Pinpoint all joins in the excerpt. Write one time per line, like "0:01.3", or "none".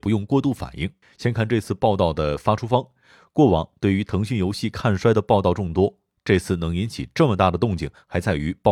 0:01.0